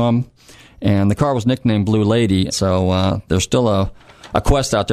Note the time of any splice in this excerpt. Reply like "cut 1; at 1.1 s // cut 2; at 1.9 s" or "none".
cut 1; at 2.5 s

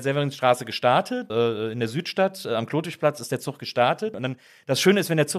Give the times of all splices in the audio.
cut 1; at 1.3 s // cut 2; at 4.1 s

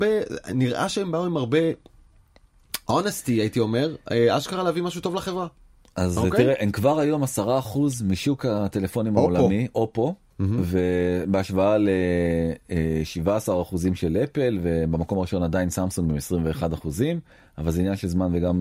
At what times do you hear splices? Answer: none

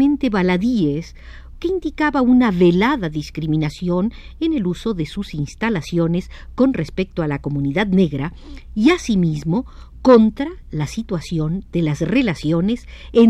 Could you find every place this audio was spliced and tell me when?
cut 1; at 1.5 s

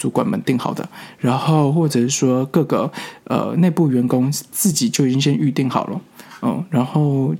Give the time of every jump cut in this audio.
none

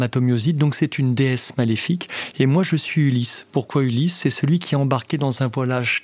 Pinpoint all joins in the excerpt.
none

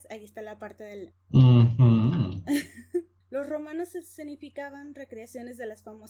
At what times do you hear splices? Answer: cut 1; at 1.1 s // cut 2; at 3.2 s

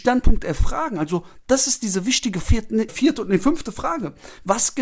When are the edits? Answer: cut 1; at 2.9 s

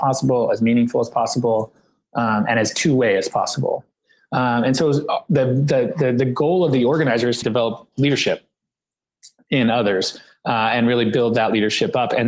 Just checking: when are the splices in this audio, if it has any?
cut 1; at 7.4 s

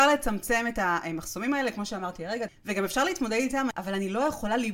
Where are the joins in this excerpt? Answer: cut 1; at 2.5 s // cut 2; at 3.7 s

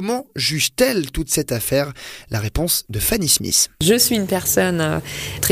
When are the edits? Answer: none

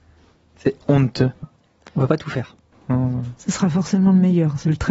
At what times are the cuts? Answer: cut 1; at 1.4 s // cut 2; at 2.7 s

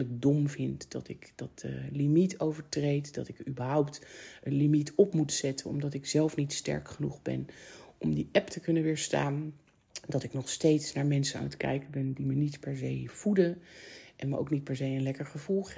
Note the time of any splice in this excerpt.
none

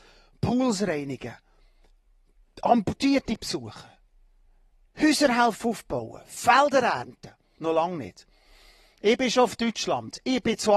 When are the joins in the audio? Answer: cut 1; at 7.5 s

